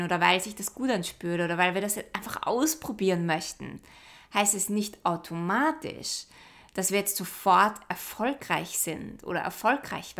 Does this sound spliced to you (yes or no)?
no